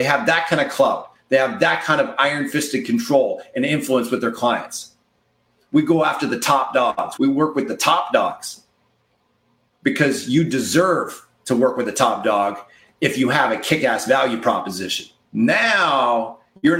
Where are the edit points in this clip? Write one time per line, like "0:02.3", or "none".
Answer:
0:07.2
0:15.2

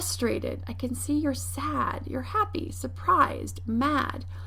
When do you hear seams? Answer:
none

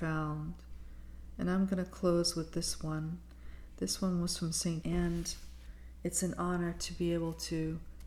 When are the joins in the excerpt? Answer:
0:04.8

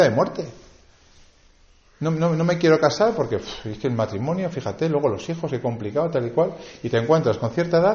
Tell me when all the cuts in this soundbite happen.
none

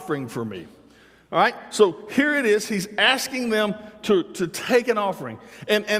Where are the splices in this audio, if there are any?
none

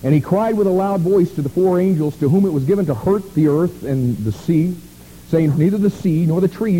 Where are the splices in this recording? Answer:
0:05.5

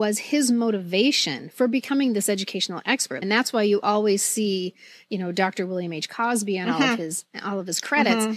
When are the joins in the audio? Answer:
0:03.2

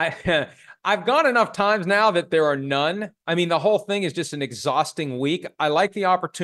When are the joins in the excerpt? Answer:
none

